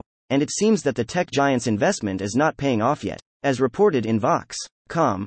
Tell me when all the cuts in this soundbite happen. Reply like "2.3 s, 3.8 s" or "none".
3.3 s